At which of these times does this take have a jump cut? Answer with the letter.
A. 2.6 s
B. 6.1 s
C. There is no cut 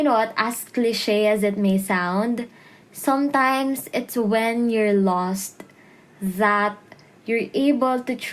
C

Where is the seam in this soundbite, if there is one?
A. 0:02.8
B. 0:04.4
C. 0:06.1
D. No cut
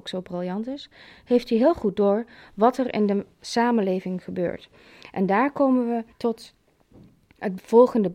C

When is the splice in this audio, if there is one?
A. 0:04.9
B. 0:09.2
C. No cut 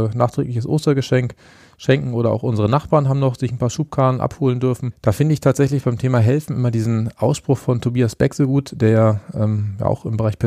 A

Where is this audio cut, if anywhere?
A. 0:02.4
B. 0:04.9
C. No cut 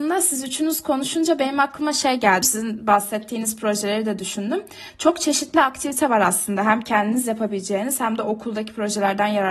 A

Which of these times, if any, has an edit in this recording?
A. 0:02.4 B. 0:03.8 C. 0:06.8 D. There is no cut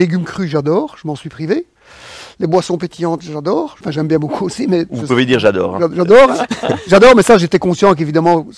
B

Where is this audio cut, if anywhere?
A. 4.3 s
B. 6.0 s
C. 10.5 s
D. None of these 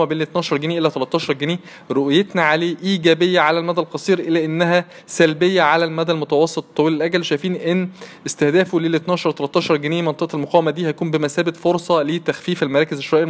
D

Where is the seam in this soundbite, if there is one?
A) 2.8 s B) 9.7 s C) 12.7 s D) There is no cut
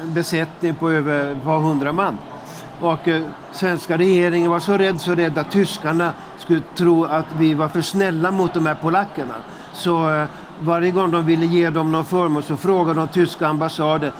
D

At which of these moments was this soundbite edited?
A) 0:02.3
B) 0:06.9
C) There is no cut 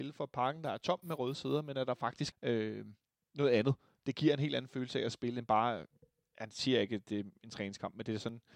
A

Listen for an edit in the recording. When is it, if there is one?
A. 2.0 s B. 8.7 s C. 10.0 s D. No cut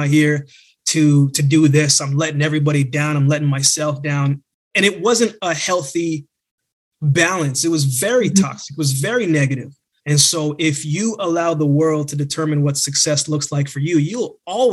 C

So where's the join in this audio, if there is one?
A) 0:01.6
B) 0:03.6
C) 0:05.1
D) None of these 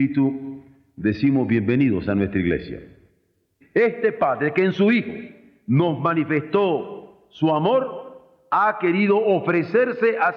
B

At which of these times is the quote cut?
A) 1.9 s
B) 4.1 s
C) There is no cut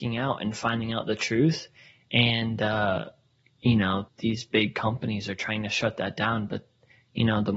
B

